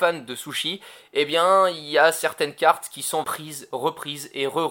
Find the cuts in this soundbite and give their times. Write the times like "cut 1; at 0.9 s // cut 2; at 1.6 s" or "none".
cut 1; at 3.2 s